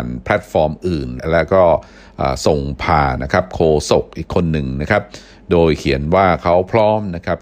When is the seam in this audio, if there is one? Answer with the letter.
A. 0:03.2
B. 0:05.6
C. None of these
A